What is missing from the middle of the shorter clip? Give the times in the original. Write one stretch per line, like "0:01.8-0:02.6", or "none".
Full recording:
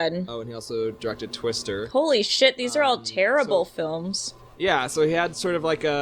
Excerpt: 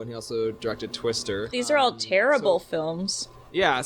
0:01.9-0:02.6